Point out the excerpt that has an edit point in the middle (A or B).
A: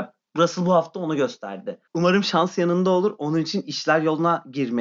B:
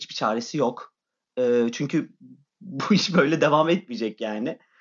A